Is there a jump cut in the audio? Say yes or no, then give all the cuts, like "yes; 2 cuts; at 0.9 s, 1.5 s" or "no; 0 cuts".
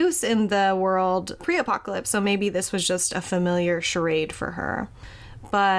yes; 1 cut; at 1.4 s